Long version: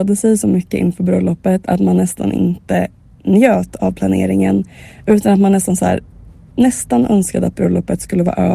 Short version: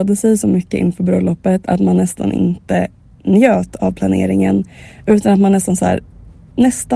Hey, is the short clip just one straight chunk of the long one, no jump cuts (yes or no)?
yes